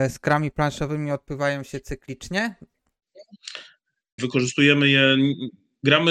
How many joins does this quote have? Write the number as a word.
one